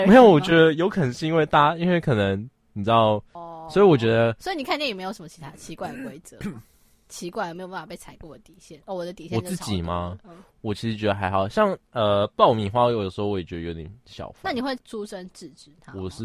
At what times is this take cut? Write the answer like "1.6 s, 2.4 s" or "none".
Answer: 3.3 s, 14.8 s